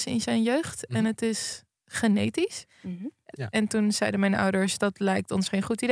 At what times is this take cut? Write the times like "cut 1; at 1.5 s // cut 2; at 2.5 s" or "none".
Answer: cut 1; at 3.3 s